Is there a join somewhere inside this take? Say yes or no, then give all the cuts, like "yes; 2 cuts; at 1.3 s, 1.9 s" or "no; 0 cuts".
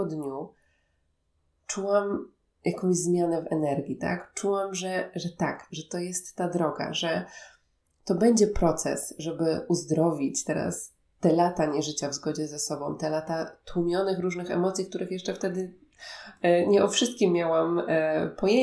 no; 0 cuts